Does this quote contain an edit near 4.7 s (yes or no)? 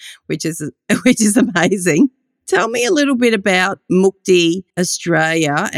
yes